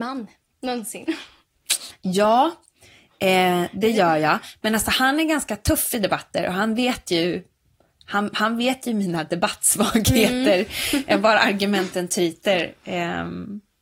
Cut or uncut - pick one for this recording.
uncut